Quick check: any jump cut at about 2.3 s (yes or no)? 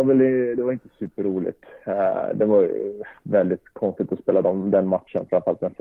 no